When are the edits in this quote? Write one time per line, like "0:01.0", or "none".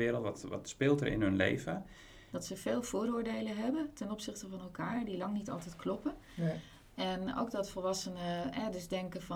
0:02.3